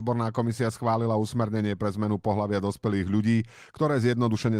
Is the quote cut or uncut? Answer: uncut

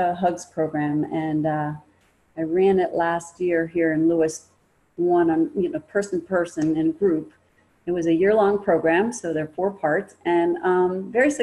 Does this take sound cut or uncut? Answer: uncut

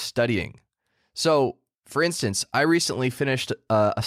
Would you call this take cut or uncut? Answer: uncut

